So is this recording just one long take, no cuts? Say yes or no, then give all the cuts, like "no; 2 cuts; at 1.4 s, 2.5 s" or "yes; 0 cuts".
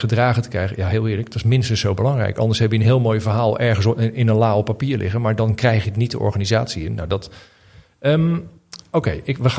yes; 0 cuts